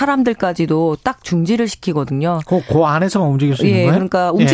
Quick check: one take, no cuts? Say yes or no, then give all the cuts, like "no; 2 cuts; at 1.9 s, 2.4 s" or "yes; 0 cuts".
yes; 0 cuts